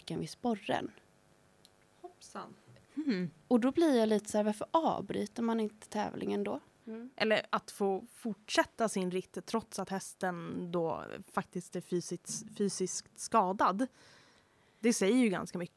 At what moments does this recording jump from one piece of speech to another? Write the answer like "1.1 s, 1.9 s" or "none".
6.8 s